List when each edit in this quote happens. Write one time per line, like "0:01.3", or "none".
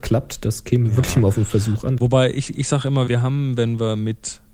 0:02.0
0:03.1